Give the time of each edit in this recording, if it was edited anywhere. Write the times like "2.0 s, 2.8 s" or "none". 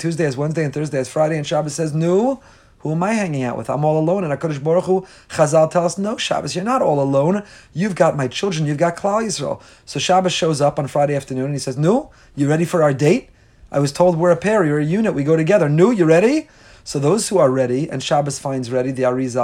none